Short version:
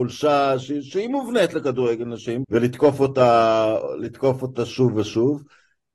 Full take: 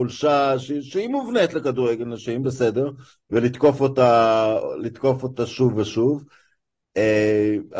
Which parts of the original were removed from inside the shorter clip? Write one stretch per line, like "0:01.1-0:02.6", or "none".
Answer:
0:02.4-0:03.2